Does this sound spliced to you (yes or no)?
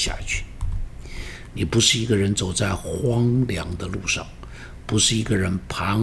yes